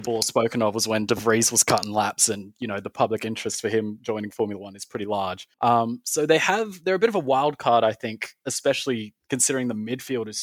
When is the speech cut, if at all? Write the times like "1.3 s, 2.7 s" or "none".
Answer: 5.5 s

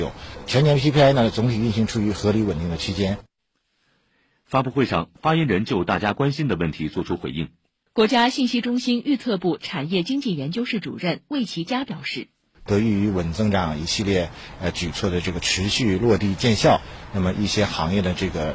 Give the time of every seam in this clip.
7.9 s, 12.7 s

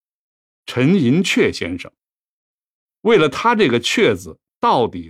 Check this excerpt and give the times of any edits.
none

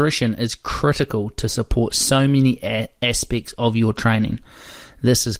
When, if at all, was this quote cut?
none

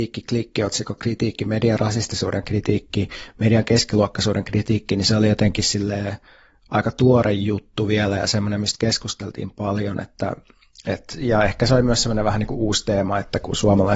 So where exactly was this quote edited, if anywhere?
none

